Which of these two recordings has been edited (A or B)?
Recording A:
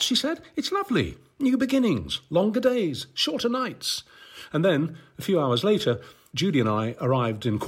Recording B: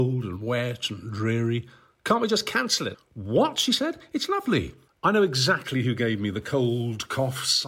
B